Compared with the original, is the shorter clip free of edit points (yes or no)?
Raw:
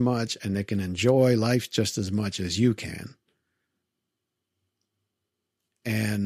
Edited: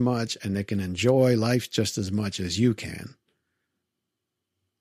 yes